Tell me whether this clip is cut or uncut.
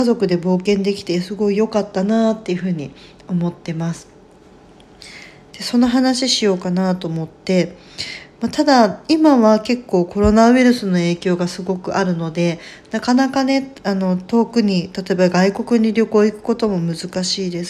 cut